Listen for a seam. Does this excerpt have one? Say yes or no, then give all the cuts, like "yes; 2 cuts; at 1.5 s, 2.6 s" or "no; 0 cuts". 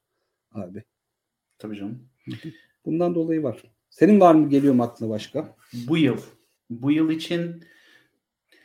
no; 0 cuts